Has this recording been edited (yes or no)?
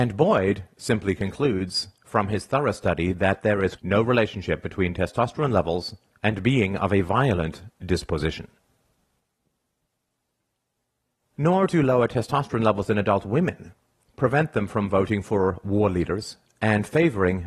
yes